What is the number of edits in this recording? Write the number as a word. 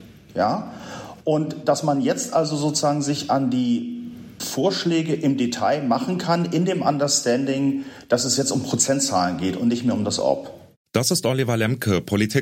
zero